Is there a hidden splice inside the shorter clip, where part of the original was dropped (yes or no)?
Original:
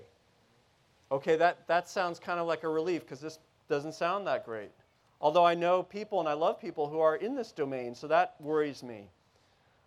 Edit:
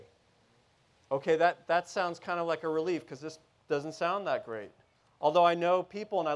no